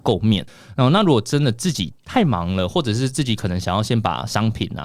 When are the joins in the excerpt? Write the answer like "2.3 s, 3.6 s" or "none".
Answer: none